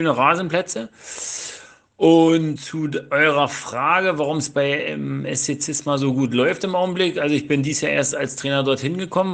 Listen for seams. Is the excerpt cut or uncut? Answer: cut